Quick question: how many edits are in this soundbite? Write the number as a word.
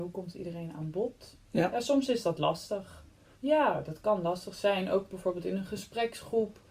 one